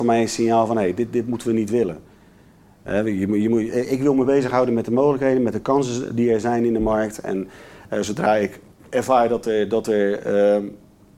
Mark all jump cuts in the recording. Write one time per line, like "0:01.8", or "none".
none